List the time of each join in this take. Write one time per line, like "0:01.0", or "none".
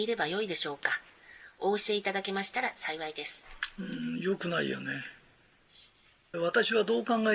0:06.3